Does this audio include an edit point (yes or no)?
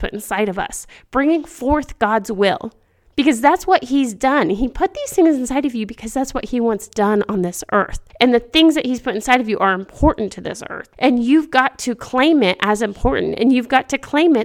no